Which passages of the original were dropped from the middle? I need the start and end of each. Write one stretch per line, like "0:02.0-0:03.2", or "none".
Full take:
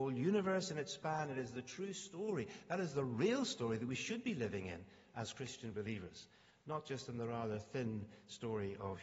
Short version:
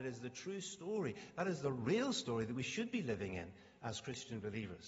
none